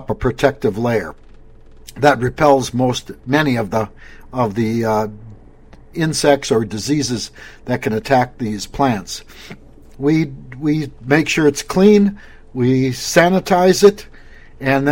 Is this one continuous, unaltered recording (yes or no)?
no